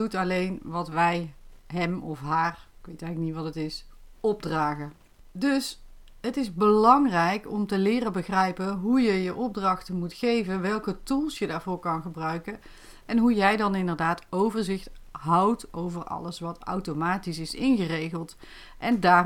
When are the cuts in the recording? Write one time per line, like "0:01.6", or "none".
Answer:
none